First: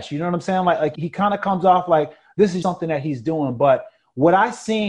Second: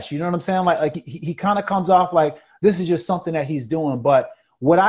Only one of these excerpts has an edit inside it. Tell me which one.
first; 2 cuts; at 0.9 s, 2.6 s

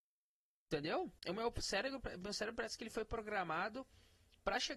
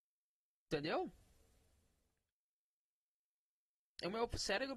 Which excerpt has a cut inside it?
first; 1 cut; at 1.2 s

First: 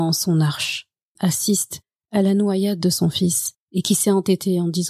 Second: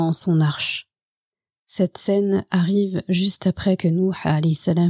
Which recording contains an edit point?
first; 2 cuts; at 1.2 s, 3.6 s

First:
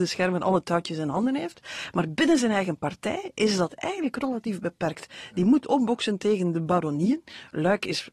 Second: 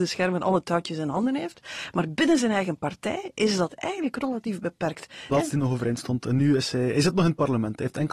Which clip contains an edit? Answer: second; 1 cut; at 5.3 s

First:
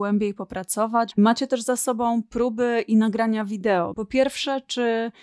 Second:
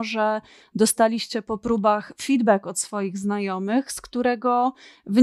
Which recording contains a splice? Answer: first; 2 cuts; at 1.1 s, 3.9 s

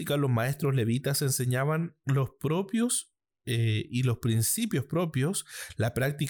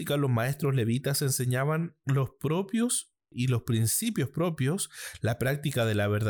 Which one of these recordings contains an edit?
second; 1 cut; at 3.3 s

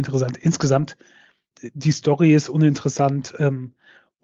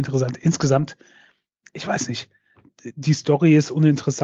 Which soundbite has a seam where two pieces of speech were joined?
first; 1 cut; at 1.5 s

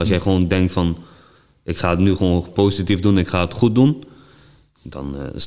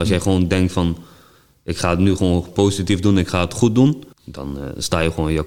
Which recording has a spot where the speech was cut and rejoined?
second; 1 cut; at 4.1 s

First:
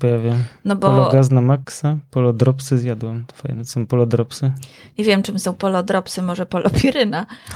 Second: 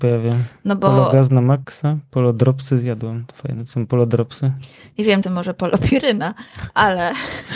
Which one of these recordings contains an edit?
second; 1 cut; at 5.2 s

